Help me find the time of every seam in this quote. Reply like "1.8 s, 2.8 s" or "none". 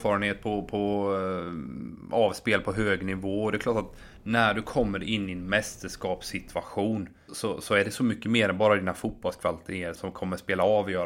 7.3 s, 10.0 s

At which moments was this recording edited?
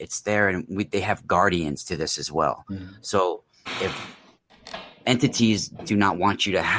none

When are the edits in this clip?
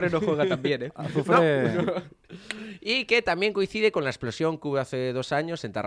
none

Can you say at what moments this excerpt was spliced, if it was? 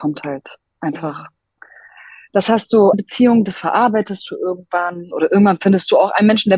2.9 s

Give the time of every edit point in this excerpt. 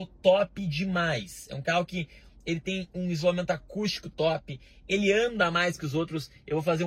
none

